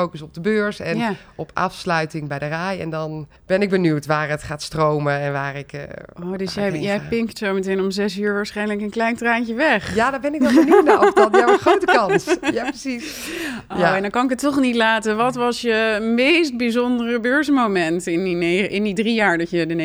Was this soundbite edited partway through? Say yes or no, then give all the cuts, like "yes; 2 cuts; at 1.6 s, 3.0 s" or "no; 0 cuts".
yes; 1 cut; at 3.4 s